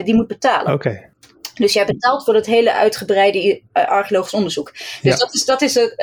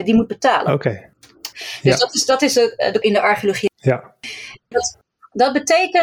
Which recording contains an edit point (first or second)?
second